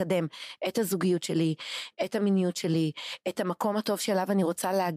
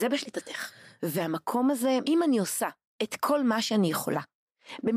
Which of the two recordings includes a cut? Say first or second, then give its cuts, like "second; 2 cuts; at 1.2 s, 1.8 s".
second; 2 cuts; at 1.0 s, 2.0 s